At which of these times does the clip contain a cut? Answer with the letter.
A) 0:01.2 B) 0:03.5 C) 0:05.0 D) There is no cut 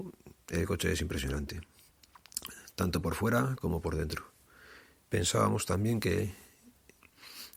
C